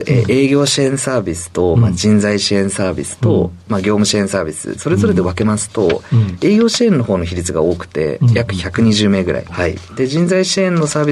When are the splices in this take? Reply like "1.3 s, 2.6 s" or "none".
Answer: 4.7 s, 9.5 s